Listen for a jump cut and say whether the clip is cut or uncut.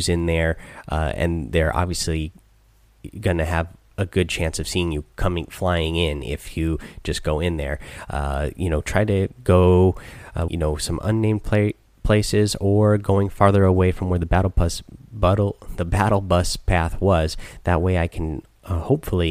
cut